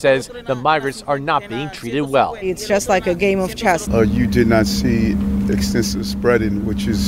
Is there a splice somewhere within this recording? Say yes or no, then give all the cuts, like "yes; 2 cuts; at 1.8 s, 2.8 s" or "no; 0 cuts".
yes; 1 cut; at 3.9 s